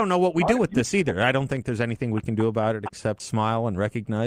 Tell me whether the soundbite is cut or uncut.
cut